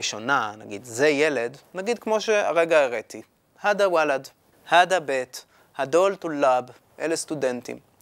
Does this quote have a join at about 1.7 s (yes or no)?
no